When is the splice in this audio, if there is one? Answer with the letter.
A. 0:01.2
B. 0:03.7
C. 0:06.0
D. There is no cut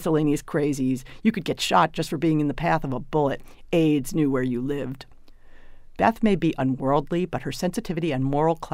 D